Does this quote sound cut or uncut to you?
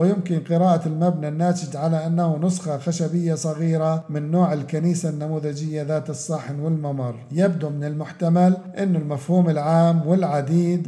uncut